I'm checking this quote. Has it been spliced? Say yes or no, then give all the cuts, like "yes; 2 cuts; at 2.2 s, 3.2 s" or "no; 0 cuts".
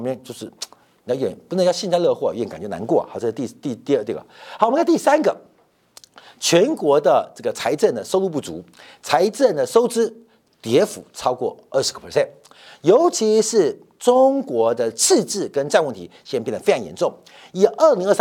no; 0 cuts